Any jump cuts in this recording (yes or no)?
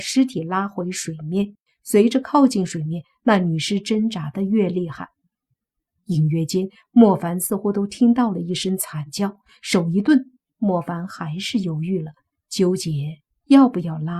no